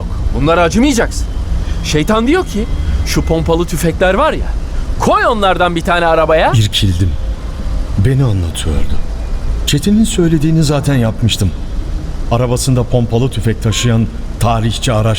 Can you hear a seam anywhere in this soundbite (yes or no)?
no